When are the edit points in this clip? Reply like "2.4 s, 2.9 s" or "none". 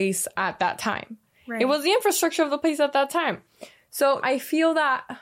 4.2 s